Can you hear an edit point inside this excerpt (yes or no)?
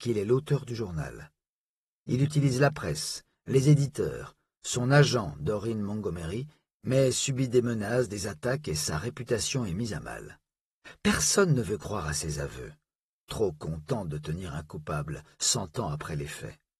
no